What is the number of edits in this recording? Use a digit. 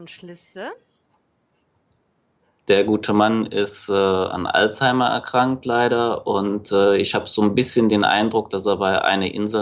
0